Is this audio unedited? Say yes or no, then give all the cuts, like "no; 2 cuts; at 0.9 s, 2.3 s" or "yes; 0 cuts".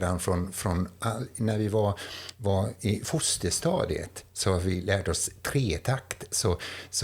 yes; 0 cuts